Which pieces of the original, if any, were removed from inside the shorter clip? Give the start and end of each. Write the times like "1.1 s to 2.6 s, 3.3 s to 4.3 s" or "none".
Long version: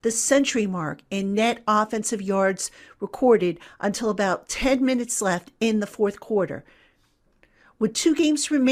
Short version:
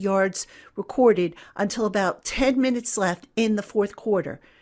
none